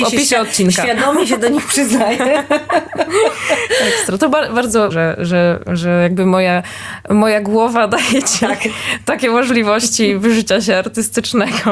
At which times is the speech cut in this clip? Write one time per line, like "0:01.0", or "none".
0:04.9